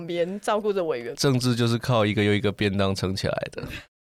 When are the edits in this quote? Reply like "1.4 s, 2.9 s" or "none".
1.1 s